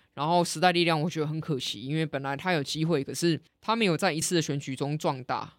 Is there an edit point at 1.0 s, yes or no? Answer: no